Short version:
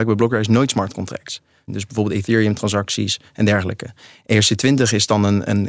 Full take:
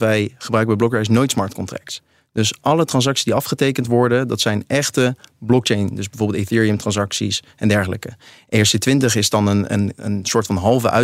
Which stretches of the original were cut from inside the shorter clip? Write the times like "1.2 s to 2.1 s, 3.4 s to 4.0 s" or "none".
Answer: 2.3 s to 5.9 s